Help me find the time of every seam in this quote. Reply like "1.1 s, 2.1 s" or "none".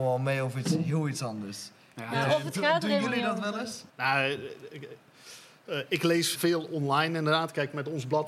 3.9 s, 6.3 s